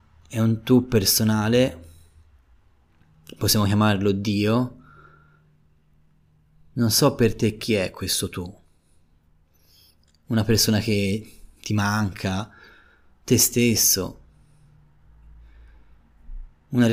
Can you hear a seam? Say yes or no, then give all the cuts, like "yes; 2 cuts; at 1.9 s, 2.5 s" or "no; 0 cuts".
no; 0 cuts